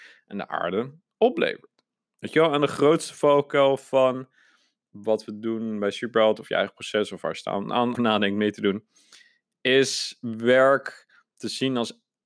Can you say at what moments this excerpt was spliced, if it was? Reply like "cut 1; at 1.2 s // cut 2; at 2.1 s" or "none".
cut 1; at 7.9 s